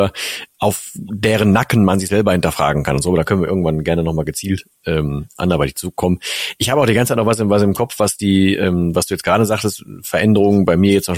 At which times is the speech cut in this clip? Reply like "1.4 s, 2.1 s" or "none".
none